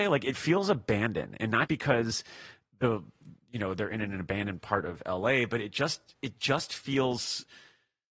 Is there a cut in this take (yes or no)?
yes